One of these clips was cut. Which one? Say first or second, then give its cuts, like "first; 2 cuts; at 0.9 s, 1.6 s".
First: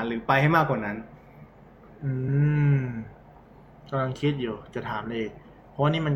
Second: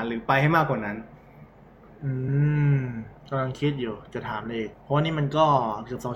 second; 2 cuts; at 3.2 s, 4.7 s